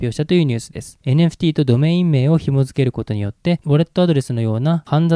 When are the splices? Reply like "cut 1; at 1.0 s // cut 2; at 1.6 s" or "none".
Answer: cut 1; at 1.0 s

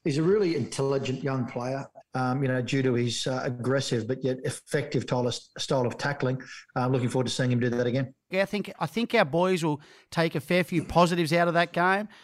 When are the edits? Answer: cut 1; at 2.0 s // cut 2; at 8.3 s

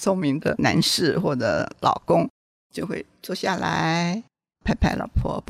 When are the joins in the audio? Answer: none

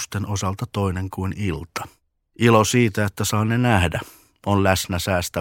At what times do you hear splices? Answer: cut 1; at 2.2 s

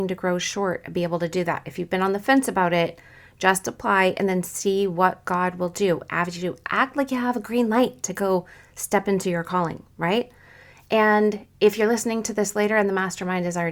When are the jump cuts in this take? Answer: none

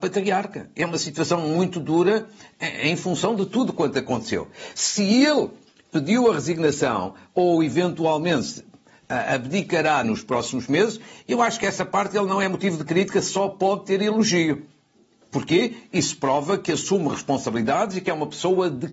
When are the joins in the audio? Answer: cut 1; at 10.0 s

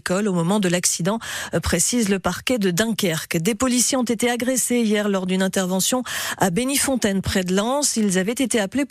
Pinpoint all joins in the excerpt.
none

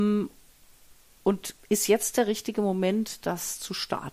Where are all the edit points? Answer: cut 1; at 1.6 s

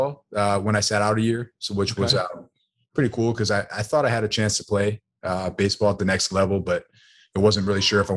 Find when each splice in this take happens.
none

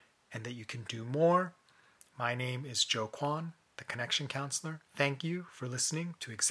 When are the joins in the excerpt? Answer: cut 1; at 2.1 s // cut 2; at 4.8 s

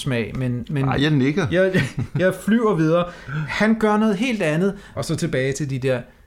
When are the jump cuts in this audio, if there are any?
cut 1; at 5.0 s

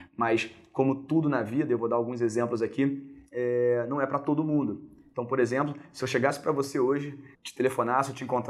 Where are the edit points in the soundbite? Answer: cut 1; at 7.3 s

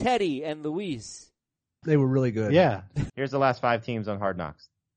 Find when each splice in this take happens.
cut 1; at 1.8 s // cut 2; at 3.1 s

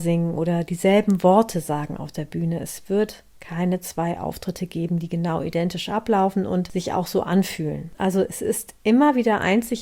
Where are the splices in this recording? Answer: cut 1; at 7.9 s

